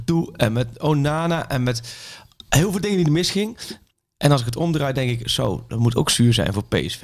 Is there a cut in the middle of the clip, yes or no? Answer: no